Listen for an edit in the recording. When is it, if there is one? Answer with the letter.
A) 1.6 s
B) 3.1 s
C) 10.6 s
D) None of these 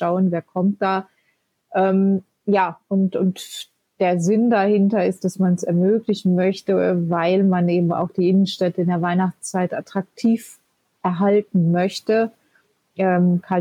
D